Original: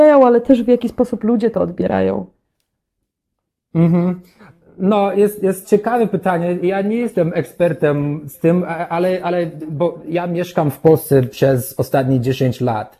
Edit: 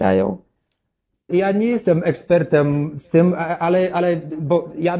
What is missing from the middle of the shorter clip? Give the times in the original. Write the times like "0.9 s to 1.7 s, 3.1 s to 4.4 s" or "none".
3.2 s to 6.6 s